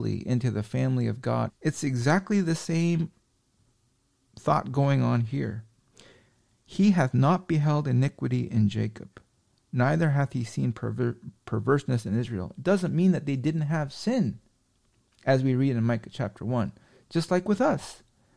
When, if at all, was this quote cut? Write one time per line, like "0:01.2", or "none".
0:01.5